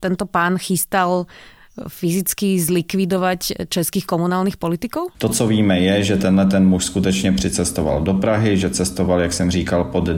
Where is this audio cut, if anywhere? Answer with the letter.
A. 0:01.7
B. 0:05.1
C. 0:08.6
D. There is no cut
B